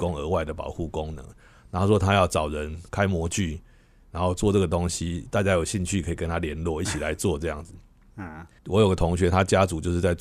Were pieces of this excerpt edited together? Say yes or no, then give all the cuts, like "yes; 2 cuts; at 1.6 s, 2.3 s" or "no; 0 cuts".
yes; 1 cut; at 8.6 s